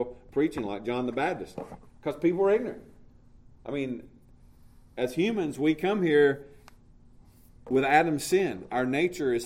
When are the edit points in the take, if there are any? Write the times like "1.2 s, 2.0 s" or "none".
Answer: none